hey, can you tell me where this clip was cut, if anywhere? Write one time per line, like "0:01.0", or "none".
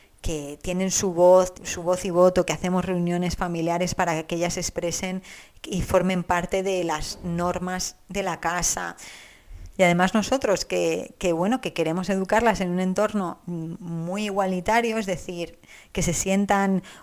0:01.5
0:09.7